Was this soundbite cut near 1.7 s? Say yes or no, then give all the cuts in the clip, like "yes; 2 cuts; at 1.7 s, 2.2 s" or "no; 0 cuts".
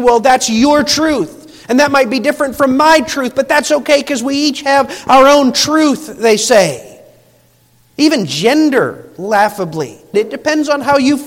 no; 1 cut; at 10.1 s